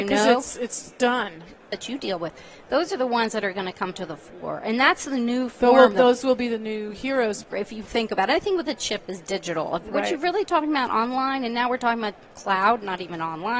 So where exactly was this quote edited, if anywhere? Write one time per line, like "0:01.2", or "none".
0:01.7
0:07.4